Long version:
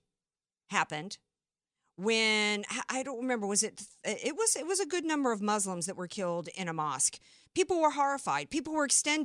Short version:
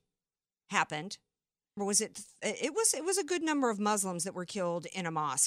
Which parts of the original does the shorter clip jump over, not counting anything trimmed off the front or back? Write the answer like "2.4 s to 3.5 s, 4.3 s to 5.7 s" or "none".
1.8 s to 3.4 s